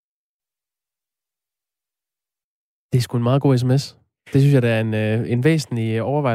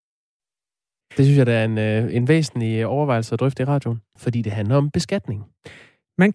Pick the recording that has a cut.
second; 2 cuts; at 1.0 s, 4.2 s

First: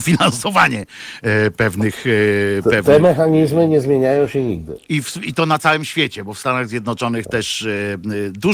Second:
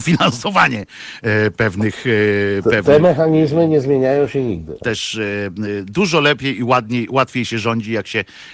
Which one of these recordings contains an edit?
second; 1 cut; at 4.8 s

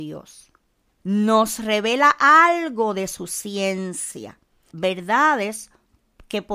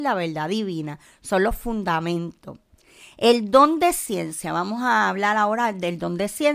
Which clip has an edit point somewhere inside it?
first; 2 cuts; at 1.0 s, 4.7 s

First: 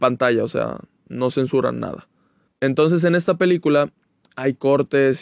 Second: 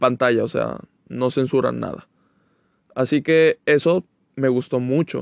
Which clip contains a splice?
first; 1 cut; at 2.5 s

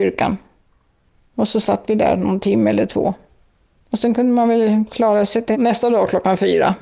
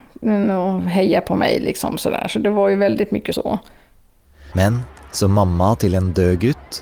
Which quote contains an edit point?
second; 1 cut; at 4.5 s

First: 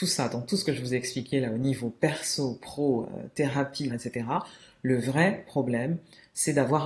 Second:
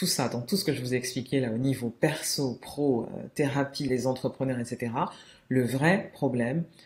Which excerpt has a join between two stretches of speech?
first; 1 cut; at 3.9 s

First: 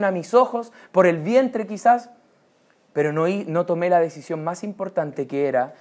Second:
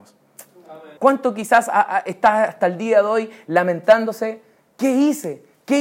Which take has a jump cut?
second; 1 cut; at 1.0 s

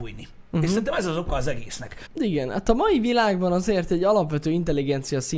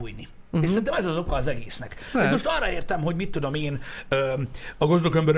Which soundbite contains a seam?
first; 1 cut; at 2.1 s

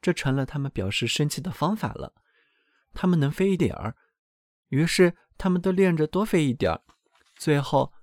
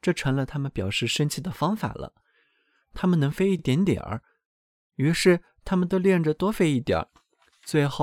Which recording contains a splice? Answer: first; 1 cut; at 3.6 s

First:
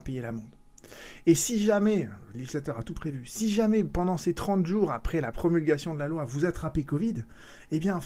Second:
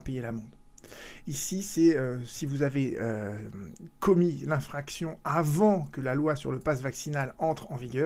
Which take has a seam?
second; 1 cut; at 1.2 s

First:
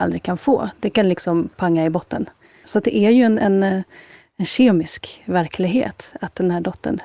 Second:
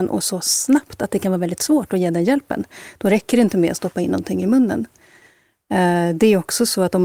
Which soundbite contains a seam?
first; 1 cut; at 2.6 s

